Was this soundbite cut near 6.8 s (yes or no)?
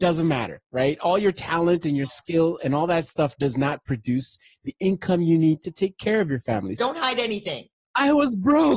yes